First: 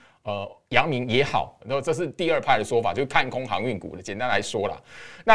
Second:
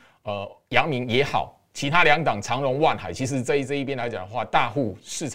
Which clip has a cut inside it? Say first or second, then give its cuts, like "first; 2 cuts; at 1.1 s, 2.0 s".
first; 1 cut; at 1.6 s